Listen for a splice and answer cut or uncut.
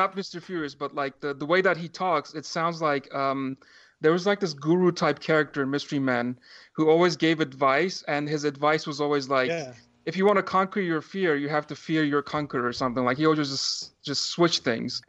uncut